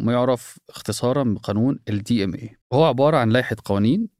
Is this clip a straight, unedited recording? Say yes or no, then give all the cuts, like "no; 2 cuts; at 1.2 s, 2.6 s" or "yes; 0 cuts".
no; 1 cut; at 2.6 s